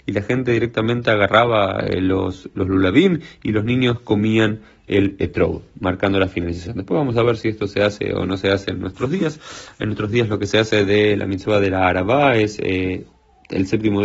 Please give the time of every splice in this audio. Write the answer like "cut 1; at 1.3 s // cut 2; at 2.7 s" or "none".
none